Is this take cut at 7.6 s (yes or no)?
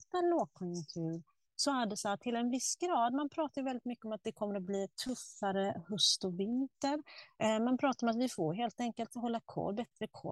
no